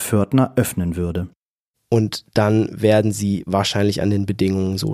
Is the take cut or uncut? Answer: cut